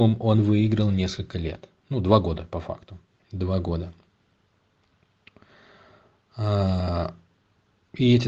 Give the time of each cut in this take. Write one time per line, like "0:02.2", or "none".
none

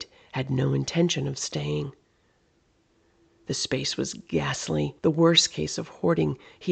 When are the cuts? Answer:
0:05.0

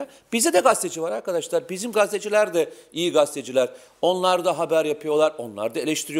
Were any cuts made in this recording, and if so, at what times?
none

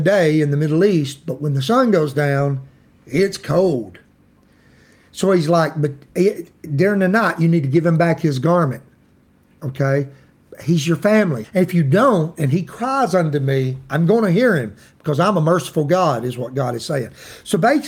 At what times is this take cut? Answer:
0:11.4

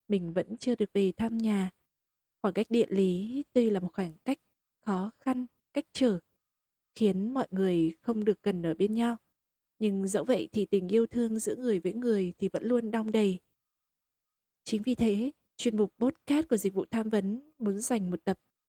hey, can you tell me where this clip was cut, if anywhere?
0:15.5

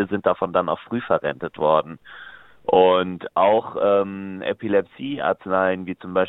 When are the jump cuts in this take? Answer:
none

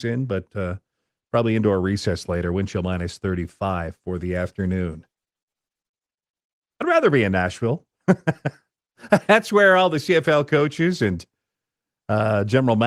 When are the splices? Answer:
none

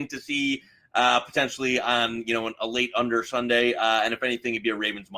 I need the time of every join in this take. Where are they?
none

